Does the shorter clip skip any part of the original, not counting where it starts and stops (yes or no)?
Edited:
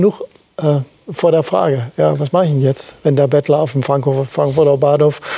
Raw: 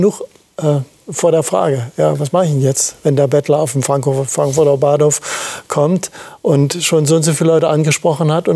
no